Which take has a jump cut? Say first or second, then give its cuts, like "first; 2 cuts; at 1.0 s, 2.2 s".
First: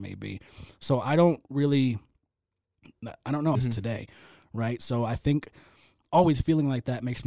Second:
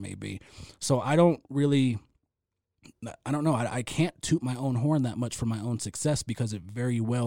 first; 1 cut; at 3.5 s